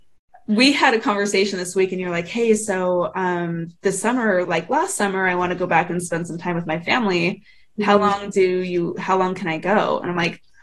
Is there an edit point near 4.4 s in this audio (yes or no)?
yes